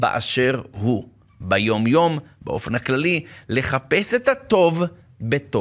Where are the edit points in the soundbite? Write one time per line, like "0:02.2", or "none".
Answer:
none